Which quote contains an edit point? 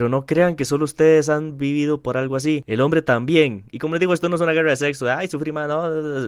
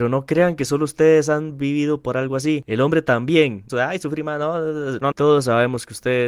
second; 2 cuts; at 3.7 s, 5.1 s

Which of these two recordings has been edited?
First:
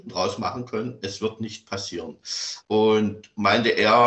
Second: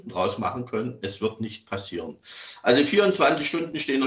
first; 1 cut; at 2.6 s

